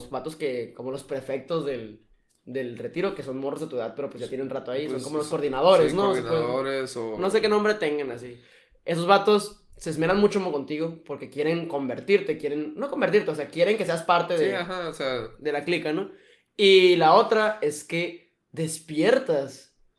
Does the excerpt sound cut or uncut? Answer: uncut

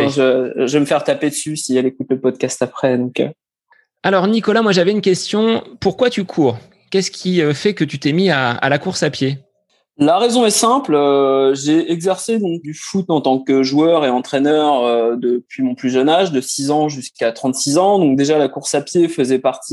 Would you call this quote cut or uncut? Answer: cut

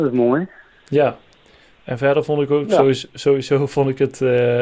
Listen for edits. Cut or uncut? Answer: uncut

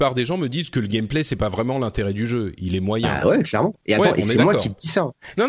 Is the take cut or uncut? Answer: uncut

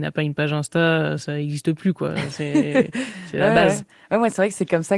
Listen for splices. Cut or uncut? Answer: uncut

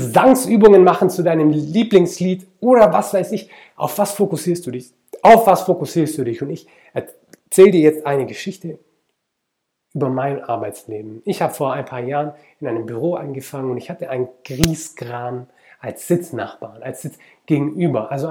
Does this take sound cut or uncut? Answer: uncut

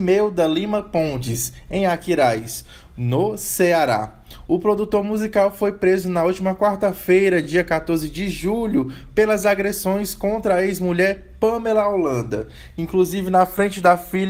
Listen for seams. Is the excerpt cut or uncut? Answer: uncut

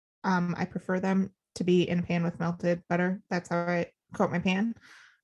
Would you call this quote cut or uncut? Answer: uncut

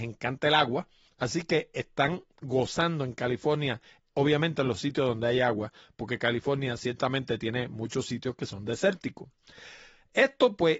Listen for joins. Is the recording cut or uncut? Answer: uncut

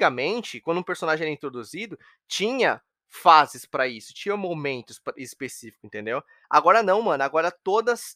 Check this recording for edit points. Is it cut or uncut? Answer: uncut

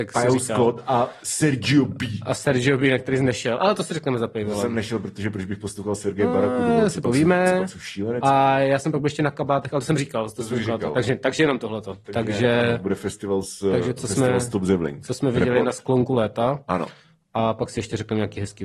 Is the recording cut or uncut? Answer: uncut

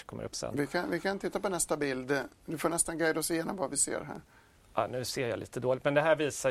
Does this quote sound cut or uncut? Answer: uncut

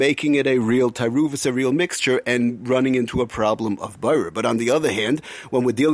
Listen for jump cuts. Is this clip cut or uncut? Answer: uncut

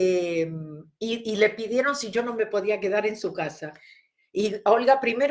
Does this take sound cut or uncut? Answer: uncut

